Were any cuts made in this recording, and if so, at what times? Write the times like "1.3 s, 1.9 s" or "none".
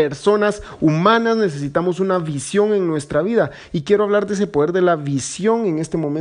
none